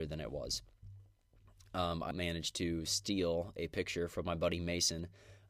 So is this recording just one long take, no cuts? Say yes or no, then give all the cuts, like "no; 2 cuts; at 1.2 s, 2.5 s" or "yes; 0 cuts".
no; 1 cut; at 2.1 s